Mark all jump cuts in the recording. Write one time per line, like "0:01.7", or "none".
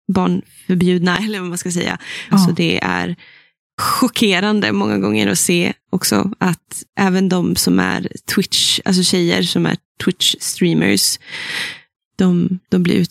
0:02.3
0:11.9